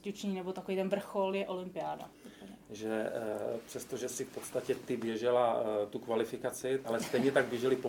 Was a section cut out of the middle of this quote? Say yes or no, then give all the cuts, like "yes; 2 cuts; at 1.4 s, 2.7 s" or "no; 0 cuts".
yes; 2 cuts; at 2.1 s, 6.8 s